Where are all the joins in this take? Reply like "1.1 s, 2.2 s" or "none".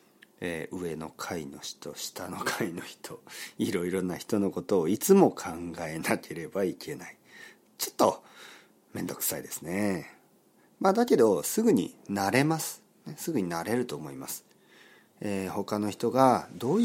none